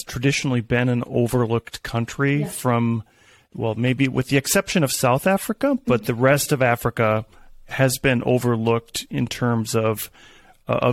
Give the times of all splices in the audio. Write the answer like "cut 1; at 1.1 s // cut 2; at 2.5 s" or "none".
none